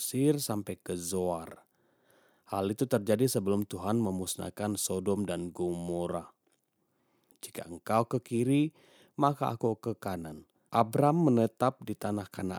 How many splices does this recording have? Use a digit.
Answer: 2